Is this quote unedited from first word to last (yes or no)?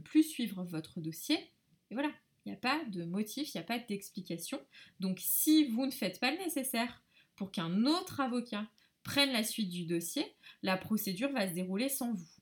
yes